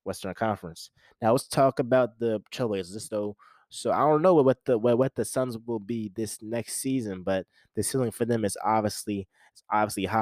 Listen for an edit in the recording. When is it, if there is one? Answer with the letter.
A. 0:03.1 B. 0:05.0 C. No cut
A